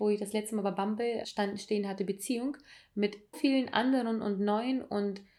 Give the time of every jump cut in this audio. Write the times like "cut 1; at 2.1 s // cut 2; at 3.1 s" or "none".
cut 1; at 1.2 s // cut 2; at 3.3 s